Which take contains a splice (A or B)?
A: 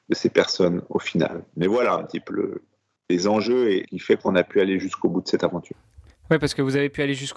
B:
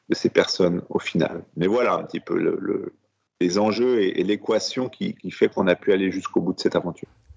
A